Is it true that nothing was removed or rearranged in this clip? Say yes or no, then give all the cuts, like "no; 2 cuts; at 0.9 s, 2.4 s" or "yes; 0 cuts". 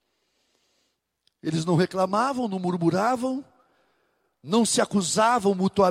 yes; 0 cuts